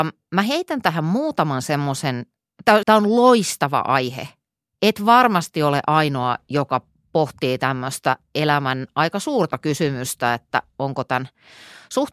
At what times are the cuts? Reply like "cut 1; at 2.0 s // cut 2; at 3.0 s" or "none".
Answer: cut 1; at 2.8 s